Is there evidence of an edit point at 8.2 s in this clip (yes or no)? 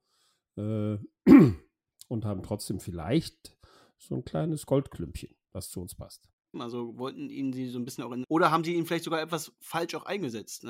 yes